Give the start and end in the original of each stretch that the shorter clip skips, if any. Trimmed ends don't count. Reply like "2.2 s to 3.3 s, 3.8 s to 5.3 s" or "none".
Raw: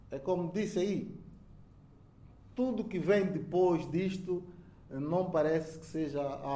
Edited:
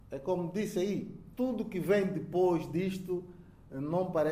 1.3 s to 2.5 s